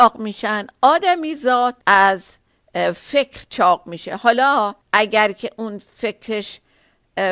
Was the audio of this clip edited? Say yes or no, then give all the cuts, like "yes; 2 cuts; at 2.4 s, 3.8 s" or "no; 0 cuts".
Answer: yes; 2 cuts; at 1.8 s, 4.8 s